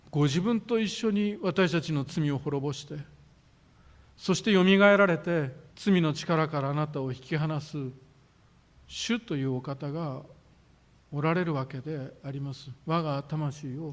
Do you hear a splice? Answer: yes; 1 cut; at 5.7 s

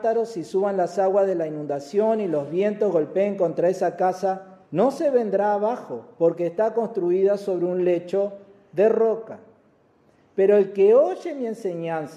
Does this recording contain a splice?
yes; 1 cut; at 4.7 s

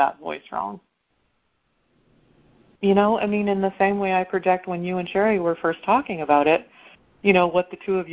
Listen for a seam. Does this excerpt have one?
yes; 1 cut; at 2.8 s

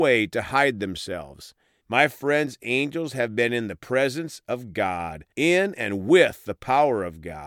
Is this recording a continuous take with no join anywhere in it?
no; 2 cuts; at 1.8 s, 5.3 s

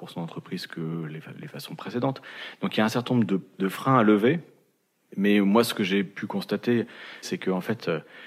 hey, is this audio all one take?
yes; 0 cuts

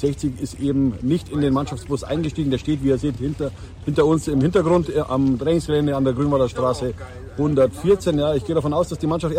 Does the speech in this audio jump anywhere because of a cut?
no; 0 cuts

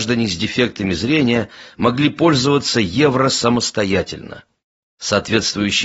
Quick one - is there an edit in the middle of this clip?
yes; 1 cut; at 4.8 s

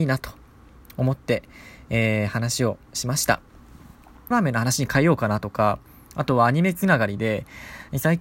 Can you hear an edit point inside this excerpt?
yes; 1 cut; at 4.3 s

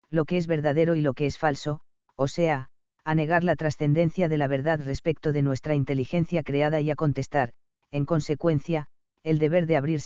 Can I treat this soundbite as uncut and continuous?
yes; 0 cuts

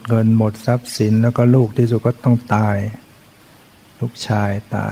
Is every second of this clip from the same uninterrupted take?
yes; 0 cuts

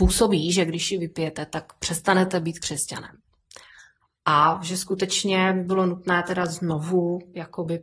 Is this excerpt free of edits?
yes; 0 cuts

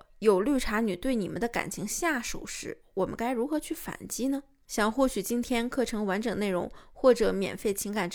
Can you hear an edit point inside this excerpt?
no; 0 cuts

